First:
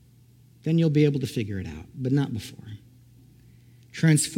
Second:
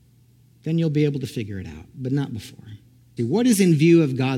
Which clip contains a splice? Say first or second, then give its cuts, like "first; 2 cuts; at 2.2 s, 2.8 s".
second; 1 cut; at 3.2 s